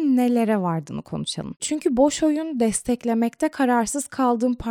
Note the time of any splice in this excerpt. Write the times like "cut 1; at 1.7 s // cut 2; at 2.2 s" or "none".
cut 1; at 1.6 s